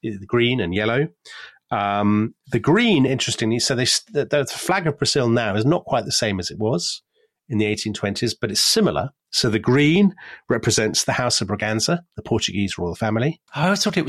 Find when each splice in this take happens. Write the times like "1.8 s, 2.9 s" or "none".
none